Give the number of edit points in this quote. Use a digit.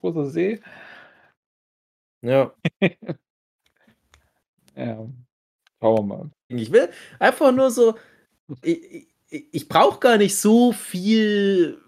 3